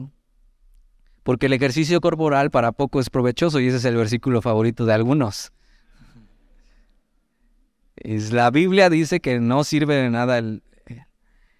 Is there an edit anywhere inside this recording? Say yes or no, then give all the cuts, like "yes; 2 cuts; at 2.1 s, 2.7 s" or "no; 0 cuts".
no; 0 cuts